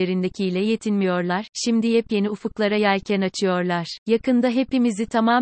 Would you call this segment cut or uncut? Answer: cut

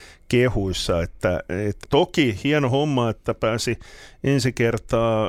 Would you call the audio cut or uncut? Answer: cut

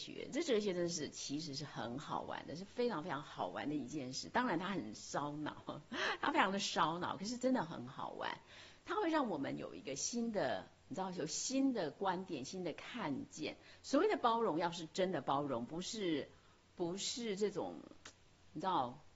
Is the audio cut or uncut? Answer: uncut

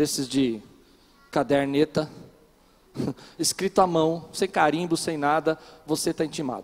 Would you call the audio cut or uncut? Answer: uncut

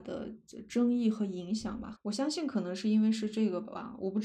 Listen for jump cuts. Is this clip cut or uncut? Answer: cut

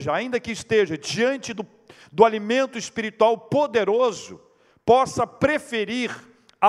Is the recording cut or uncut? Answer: uncut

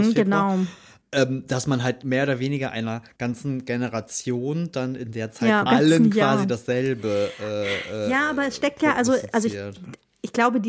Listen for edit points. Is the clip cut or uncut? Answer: cut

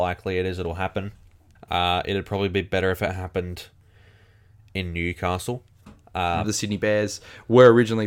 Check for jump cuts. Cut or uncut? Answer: cut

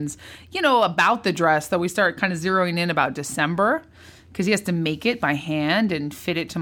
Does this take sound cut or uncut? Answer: uncut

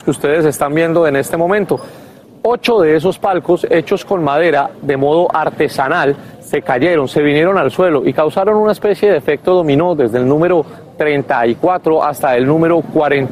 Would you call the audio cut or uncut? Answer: uncut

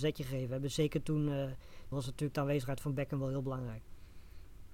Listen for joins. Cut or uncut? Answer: cut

